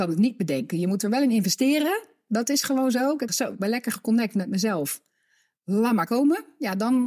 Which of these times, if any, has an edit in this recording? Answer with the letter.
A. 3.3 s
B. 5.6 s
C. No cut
A